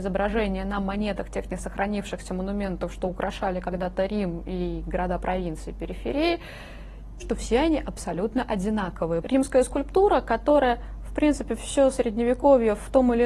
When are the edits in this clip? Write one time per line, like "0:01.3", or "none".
0:07.2
0:09.2